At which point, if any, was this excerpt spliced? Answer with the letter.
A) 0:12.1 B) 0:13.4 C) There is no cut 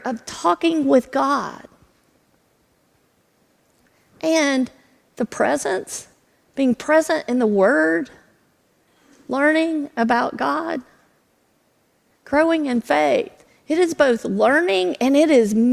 A